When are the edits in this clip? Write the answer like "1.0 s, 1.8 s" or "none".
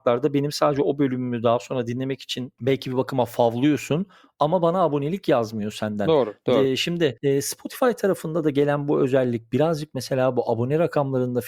none